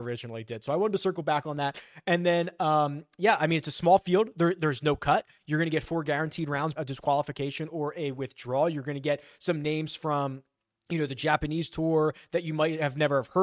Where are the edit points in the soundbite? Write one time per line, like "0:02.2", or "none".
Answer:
0:06.8